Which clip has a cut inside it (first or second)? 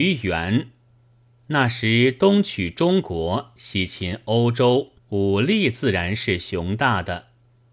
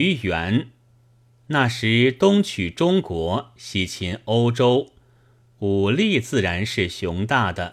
first